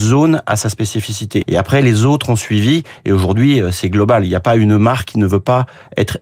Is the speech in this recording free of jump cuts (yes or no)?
no